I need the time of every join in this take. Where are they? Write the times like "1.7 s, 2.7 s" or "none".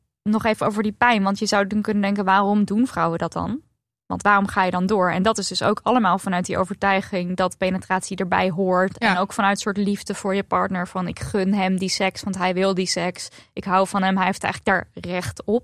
none